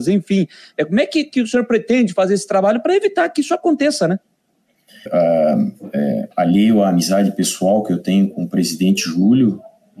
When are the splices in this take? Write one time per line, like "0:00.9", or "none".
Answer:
0:05.1